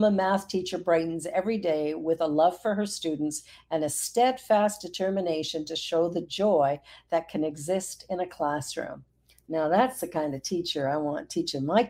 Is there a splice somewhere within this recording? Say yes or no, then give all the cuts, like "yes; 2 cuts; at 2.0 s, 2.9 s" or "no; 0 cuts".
no; 0 cuts